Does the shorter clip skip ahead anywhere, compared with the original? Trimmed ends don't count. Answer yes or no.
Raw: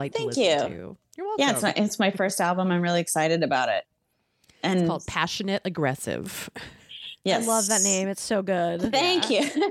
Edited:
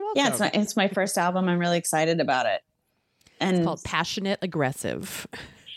no